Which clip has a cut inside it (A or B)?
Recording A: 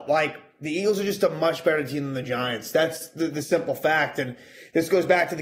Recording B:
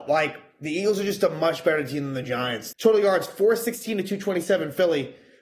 B